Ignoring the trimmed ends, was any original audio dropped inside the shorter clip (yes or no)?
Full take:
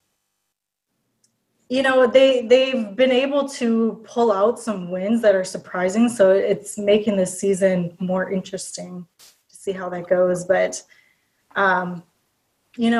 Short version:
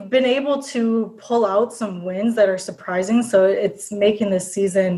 no